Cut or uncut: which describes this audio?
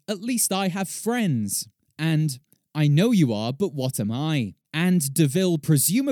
uncut